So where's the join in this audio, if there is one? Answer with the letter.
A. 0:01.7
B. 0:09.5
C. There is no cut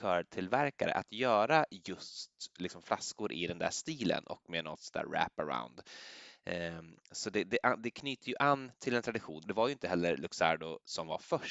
B